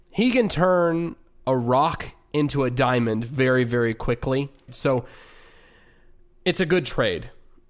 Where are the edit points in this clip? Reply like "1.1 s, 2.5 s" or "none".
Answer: 4.7 s